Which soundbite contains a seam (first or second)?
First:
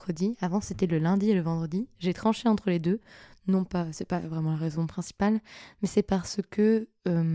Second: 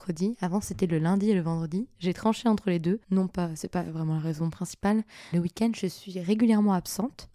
second